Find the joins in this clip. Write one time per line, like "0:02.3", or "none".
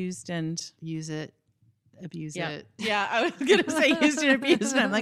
none